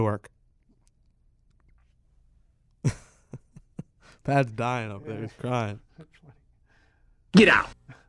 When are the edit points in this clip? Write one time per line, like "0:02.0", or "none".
none